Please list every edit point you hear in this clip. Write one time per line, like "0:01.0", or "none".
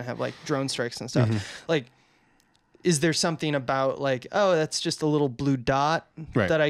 none